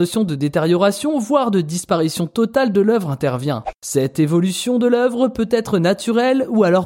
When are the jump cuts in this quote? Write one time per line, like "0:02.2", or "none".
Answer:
none